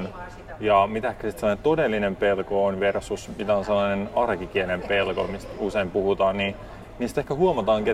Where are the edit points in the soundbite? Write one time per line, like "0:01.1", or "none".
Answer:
none